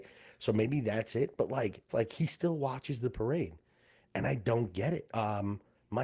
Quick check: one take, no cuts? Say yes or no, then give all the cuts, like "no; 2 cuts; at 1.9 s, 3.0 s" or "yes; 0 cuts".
no; 2 cuts; at 1.9 s, 5.1 s